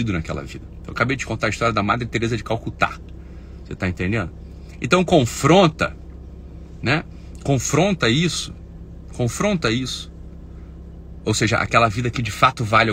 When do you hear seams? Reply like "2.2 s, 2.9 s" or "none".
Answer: none